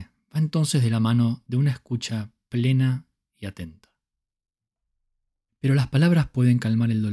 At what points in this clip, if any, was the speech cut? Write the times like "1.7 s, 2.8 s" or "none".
5.5 s